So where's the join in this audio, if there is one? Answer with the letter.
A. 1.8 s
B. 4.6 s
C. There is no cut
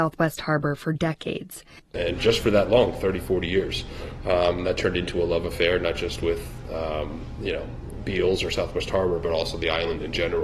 A